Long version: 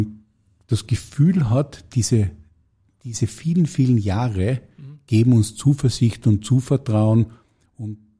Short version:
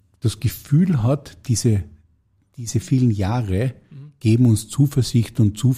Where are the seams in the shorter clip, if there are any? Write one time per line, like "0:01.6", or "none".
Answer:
0:02.8